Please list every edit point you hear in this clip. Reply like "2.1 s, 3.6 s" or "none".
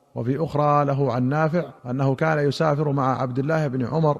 1.8 s